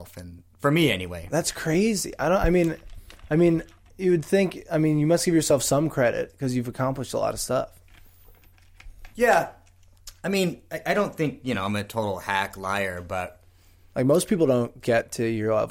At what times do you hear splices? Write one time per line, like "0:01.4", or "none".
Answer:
none